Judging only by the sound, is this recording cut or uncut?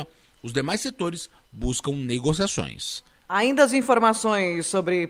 cut